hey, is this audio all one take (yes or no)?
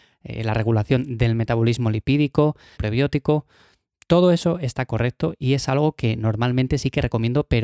no